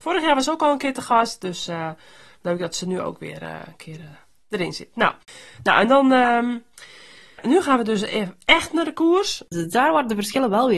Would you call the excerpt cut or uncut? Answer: cut